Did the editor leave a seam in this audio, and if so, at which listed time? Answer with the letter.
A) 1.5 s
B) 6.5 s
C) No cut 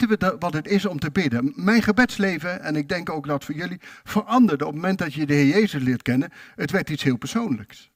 C